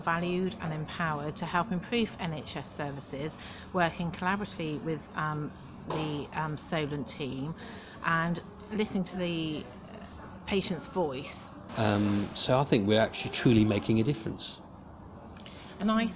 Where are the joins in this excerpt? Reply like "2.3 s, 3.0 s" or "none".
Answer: 11.7 s